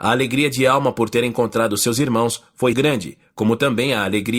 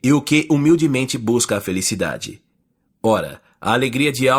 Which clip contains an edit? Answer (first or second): first